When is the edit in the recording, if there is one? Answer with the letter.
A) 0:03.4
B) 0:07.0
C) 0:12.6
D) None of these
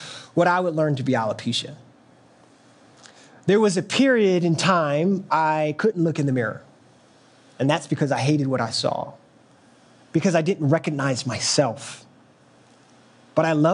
D